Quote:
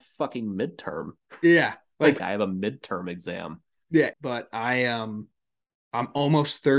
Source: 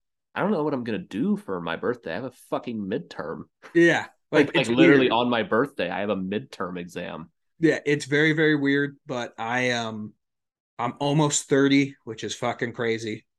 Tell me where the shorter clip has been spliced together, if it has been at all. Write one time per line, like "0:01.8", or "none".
0:02.2
0:04.1